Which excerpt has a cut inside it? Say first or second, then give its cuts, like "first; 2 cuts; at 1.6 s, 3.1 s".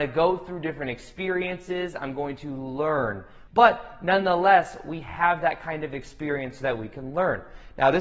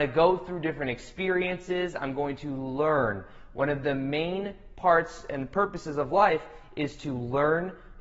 first; 1 cut; at 3.5 s